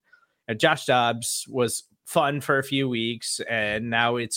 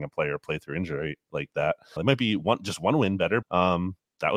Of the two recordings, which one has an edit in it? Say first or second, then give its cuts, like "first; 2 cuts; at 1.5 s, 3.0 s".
second; 2 cuts; at 2.0 s, 3.4 s